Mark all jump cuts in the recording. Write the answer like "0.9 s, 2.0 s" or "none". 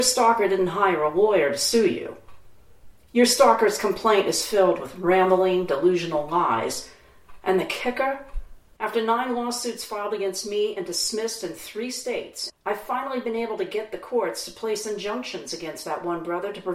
8.8 s, 12.5 s